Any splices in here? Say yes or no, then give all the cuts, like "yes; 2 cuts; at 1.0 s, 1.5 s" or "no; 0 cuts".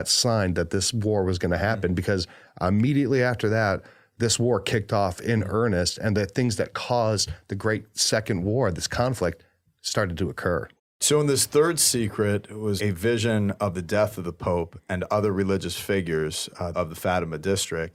yes; 2 cuts; at 12.8 s, 16.7 s